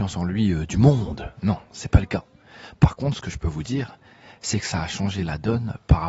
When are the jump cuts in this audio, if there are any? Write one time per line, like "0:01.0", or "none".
none